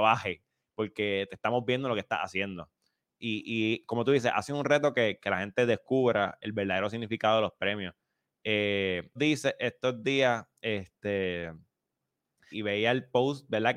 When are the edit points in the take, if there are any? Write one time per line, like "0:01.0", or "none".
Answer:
0:09.2
0:12.5